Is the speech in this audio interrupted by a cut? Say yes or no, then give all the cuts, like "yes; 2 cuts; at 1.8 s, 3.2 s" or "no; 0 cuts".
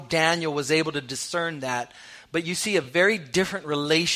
no; 0 cuts